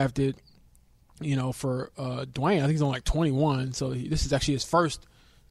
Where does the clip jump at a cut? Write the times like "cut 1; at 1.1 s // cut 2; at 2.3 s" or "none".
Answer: none